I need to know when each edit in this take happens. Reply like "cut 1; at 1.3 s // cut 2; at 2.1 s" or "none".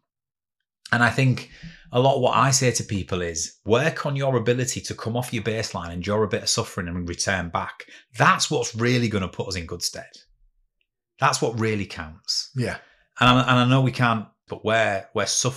cut 1; at 14.5 s